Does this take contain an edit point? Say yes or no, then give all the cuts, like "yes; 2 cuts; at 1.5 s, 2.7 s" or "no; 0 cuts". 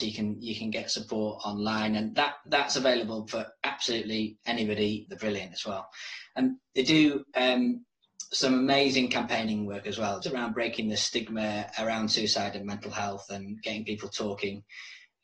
yes; 2 cuts; at 5.1 s, 10.2 s